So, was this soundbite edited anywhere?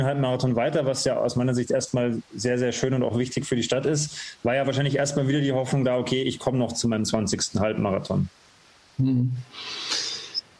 no; 0 cuts

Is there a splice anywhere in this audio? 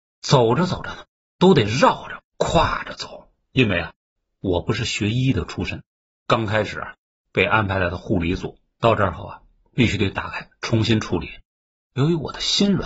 yes; 2 cuts; at 8.7 s, 11.8 s

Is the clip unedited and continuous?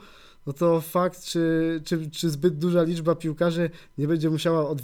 yes; 0 cuts

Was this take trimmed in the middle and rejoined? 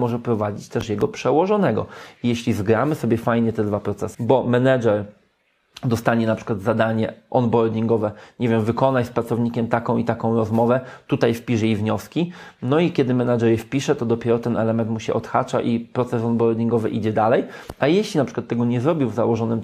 yes; 1 cut; at 4.1 s

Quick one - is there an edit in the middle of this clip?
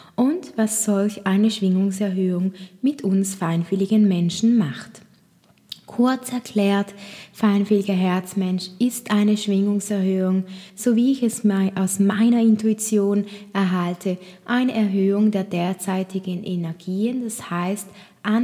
no; 0 cuts

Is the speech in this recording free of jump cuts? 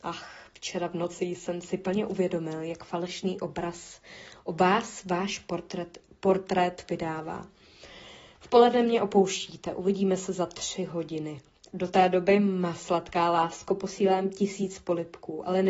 yes; 0 cuts

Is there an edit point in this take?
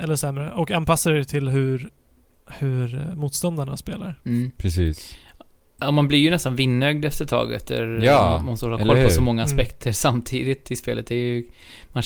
no; 0 cuts

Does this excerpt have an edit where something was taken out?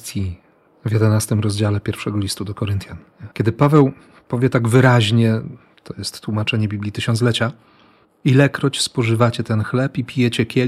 yes; 1 cut; at 3.3 s

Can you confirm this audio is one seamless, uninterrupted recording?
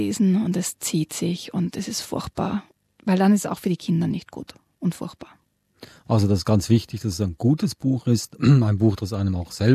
yes; 0 cuts

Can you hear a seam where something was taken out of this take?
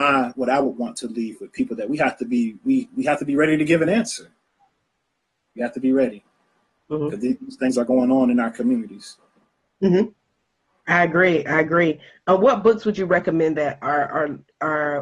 no; 0 cuts

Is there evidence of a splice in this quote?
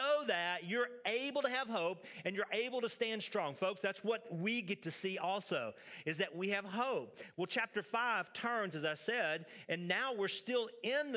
no; 0 cuts

